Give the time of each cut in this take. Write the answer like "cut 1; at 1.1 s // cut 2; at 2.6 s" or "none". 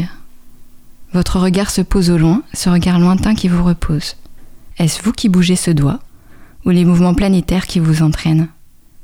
cut 1; at 4.7 s